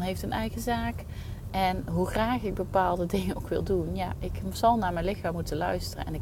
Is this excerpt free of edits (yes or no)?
no